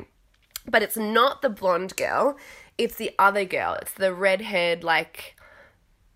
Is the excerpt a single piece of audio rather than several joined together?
yes; 0 cuts

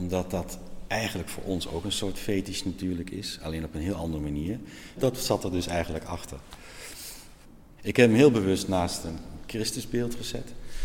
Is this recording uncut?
no; 2 cuts; at 5.0 s, 7.8 s

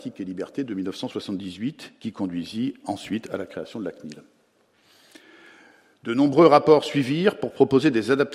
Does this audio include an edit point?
no; 0 cuts

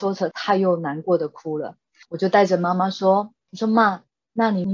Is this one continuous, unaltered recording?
no; 1 cut; at 2.0 s

